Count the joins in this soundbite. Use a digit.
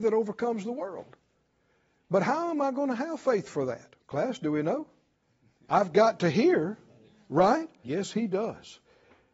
2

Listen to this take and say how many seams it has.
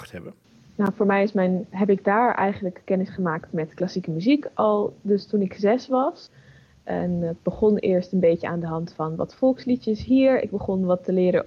1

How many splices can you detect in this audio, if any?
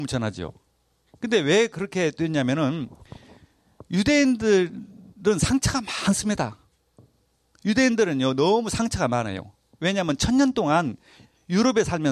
0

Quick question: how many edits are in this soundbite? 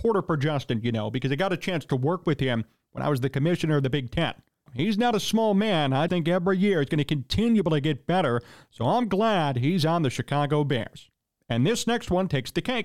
2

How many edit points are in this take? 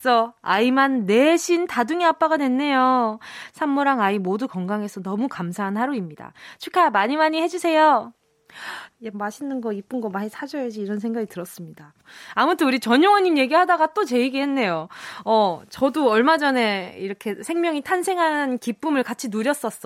1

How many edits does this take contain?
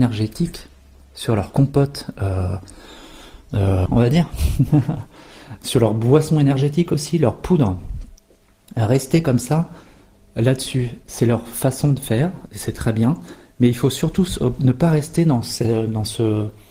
1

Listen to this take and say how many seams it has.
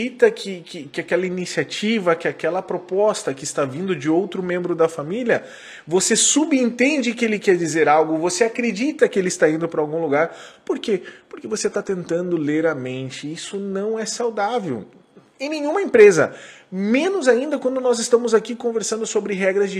0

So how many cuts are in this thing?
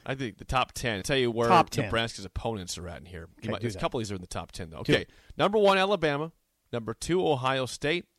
1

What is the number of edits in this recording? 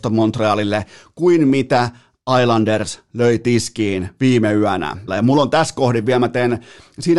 1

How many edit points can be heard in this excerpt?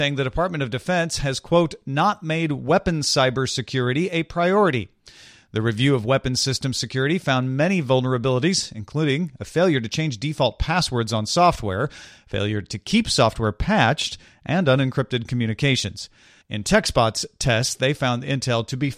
1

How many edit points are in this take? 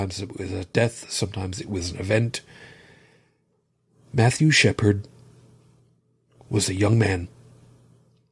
0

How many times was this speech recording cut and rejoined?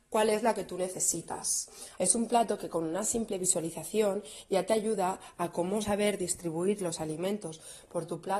1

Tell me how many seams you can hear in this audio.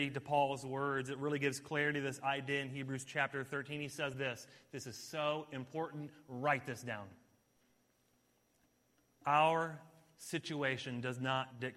0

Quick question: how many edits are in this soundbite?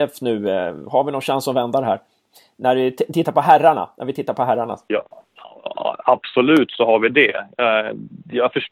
0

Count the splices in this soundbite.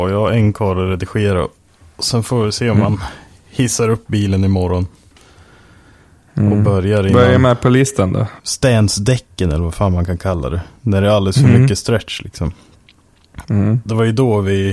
1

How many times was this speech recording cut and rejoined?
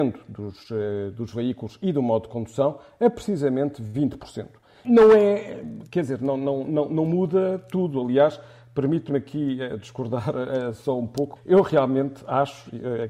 2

